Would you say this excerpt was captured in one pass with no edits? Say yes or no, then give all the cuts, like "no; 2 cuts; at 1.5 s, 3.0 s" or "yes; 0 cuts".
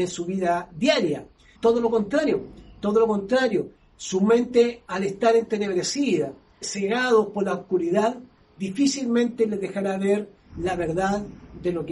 no; 2 cuts; at 1.5 s, 6.6 s